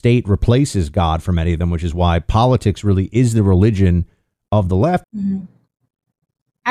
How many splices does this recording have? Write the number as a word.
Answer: one